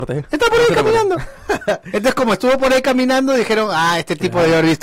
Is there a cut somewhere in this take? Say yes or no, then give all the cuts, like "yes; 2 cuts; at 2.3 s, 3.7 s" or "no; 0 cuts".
no; 0 cuts